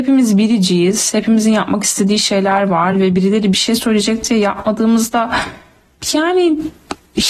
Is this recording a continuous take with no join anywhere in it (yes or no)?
yes